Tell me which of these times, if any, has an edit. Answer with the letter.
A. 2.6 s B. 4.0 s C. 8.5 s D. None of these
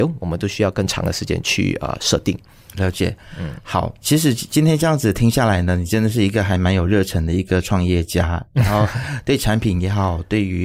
B